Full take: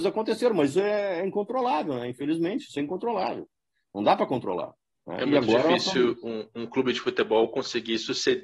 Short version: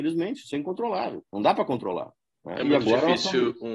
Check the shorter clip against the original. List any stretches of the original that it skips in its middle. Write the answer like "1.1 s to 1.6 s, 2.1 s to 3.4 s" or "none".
3.5 s to 3.9 s